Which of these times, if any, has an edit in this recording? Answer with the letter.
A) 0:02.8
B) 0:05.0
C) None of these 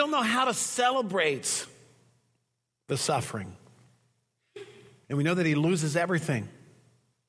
B